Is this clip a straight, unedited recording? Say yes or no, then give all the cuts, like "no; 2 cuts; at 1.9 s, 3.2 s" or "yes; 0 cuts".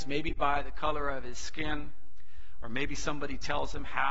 yes; 0 cuts